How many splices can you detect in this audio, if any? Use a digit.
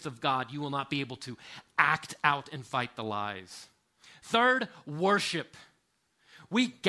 0